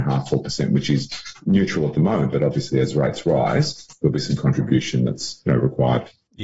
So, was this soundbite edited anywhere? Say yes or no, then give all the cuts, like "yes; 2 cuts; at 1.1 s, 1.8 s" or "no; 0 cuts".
no; 0 cuts